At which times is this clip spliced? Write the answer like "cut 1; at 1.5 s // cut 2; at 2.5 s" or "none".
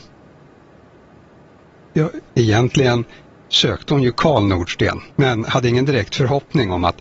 cut 1; at 2.3 s // cut 2; at 5.1 s